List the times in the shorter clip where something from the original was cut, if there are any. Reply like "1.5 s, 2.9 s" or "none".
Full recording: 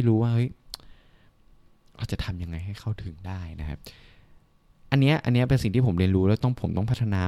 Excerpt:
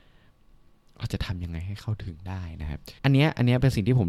3.0 s